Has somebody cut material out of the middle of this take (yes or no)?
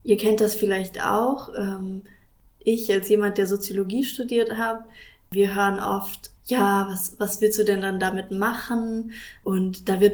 no